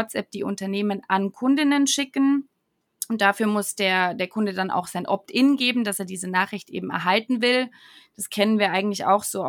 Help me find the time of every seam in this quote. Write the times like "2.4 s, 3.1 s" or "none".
none